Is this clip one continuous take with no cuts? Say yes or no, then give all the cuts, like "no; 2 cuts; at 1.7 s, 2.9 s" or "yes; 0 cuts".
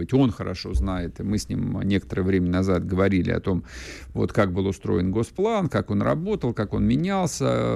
yes; 0 cuts